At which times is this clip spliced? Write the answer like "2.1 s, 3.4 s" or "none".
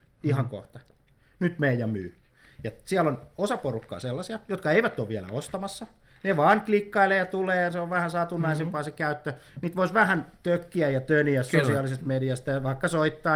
none

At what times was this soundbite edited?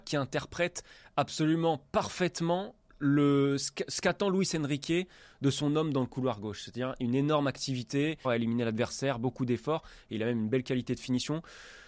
8.2 s

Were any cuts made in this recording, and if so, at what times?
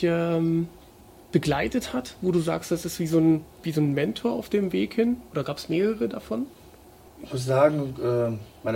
3.5 s, 7.1 s

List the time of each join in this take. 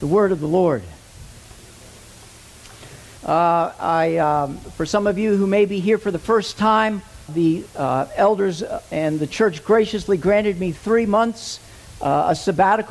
3.2 s, 7.3 s

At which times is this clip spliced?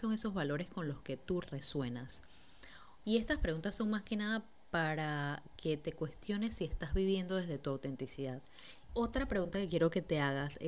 1.4 s, 3.0 s, 8.9 s

